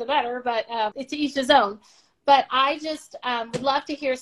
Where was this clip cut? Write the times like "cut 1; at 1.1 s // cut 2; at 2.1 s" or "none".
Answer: cut 1; at 0.9 s